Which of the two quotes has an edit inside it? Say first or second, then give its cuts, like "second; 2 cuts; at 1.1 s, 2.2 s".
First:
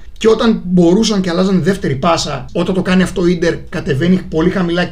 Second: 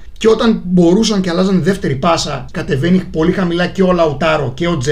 second; 1 cut; at 2.5 s